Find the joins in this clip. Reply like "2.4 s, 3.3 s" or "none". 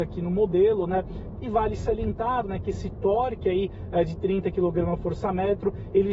1.4 s